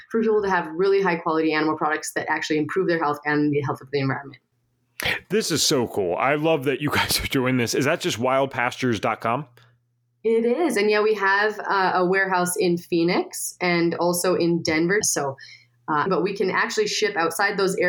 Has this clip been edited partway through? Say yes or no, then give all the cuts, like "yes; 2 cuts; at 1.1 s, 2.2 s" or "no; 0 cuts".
yes; 2 cuts; at 15.0 s, 16.1 s